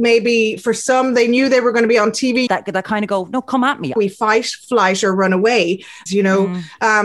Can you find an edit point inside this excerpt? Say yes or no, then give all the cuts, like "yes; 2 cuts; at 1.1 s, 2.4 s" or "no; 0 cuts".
yes; 3 cuts; at 2.5 s, 4.0 s, 6.1 s